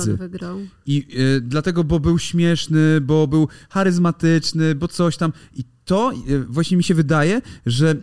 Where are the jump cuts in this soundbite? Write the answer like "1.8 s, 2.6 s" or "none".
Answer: none